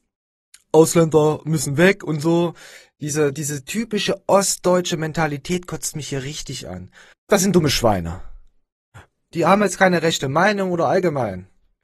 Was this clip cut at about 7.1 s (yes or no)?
yes